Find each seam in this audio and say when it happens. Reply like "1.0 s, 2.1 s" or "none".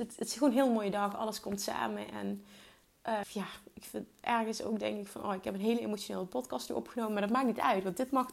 3.2 s